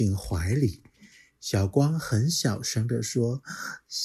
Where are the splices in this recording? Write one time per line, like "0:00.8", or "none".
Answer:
none